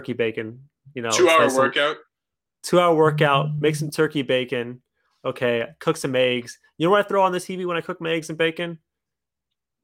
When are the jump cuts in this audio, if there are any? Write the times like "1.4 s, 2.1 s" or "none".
none

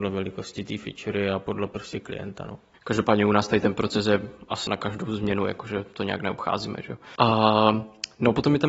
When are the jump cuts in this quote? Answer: 2.7 s, 4.7 s, 7.2 s

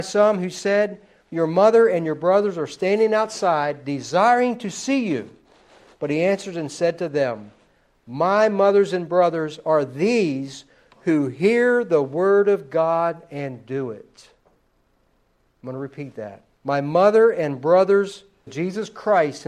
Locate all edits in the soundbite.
16.5 s, 18.5 s

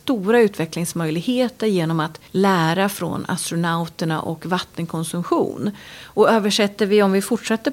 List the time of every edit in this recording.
2.3 s

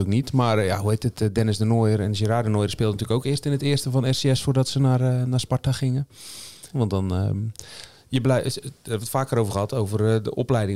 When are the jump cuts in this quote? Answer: 6.7 s

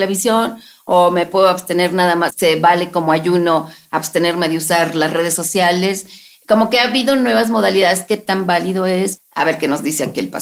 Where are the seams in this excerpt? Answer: 2.3 s, 9.2 s

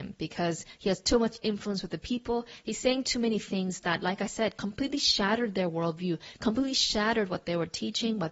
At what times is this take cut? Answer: none

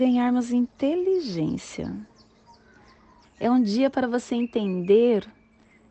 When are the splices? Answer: 3.2 s

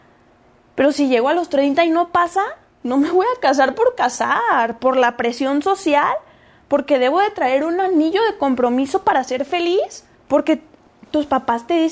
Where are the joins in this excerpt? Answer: 10.1 s

